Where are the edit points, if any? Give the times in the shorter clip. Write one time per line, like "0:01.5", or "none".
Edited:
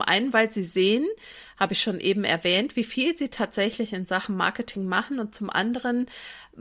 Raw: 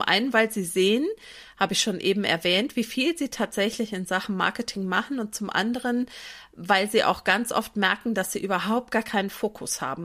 none